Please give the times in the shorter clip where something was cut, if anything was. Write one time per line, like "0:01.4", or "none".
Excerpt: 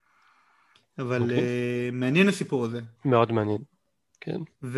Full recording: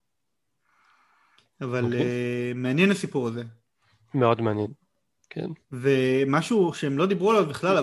0:03.0